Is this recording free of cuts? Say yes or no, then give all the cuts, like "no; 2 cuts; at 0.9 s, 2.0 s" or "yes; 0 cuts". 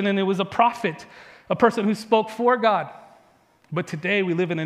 yes; 0 cuts